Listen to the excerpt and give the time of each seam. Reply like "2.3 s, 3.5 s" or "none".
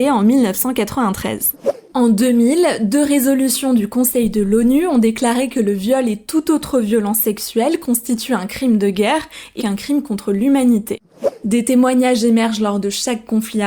9.6 s